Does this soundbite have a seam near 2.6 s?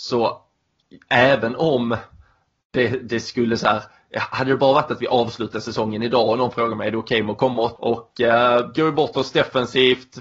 no; 1 cut; at 7.8 s

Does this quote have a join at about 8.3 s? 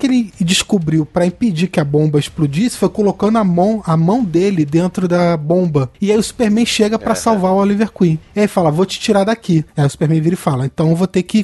no; 1 cut; at 9.7 s

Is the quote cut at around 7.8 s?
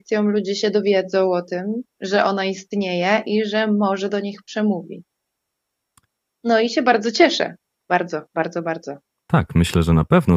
no; 2 cuts; at 6.3 s, 9.2 s

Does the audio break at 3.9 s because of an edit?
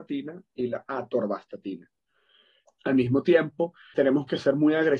yes; 2 cuts; at 2.6 s, 3.9 s

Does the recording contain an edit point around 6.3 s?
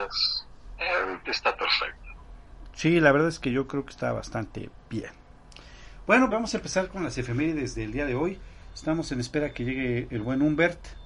yes; 1 cut; at 6.3 s

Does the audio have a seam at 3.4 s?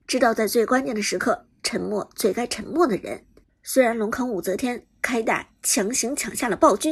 yes; 1 cut; at 3.4 s

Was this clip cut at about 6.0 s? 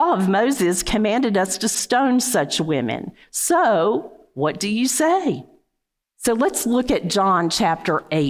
yes; 1 cut; at 6.0 s

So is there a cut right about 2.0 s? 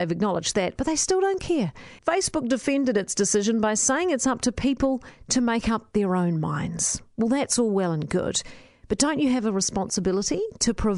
yes; 1 cut; at 2.0 s

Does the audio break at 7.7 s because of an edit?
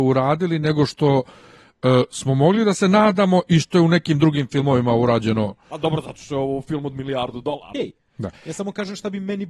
yes; 1 cut; at 7.7 s

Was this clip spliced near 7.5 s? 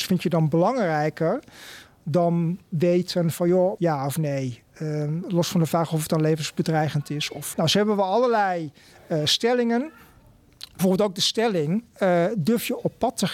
yes; 2 cuts; at 3.8 s, 7.5 s

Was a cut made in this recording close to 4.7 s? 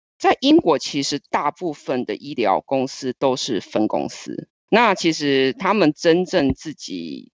yes; 1 cut; at 4.7 s

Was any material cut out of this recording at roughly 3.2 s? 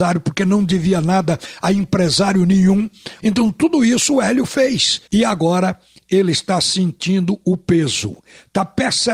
yes; 2 cuts; at 3.2 s, 5.1 s

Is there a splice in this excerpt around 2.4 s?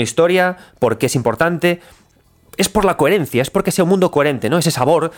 no; 0 cuts

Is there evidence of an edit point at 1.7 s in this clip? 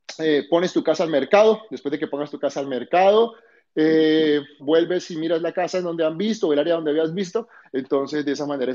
no; 2 cuts; at 4.6 s, 7.6 s

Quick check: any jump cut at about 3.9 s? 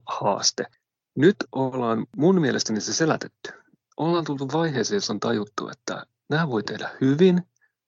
no; 0 cuts

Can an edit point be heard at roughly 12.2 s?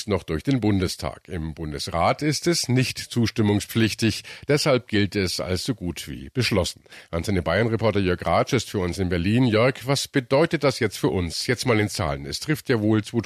no; 0 cuts

